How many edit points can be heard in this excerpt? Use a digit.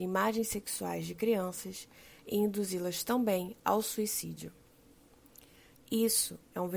1